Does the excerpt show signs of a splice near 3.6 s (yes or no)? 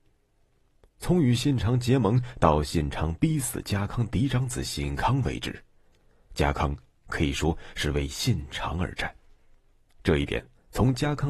no